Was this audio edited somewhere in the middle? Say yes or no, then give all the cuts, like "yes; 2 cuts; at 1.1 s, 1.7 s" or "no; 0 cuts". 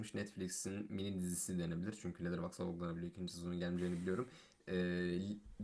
no; 0 cuts